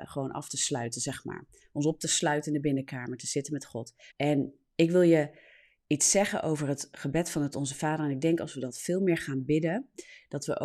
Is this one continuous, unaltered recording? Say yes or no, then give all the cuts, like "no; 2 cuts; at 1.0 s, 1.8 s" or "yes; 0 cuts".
no; 1 cut; at 4.1 s